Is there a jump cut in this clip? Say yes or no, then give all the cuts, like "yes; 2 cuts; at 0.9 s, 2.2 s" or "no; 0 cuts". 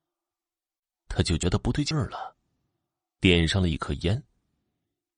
no; 0 cuts